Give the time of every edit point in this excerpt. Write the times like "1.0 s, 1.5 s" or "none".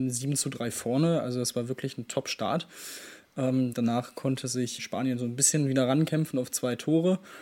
3.7 s, 4.8 s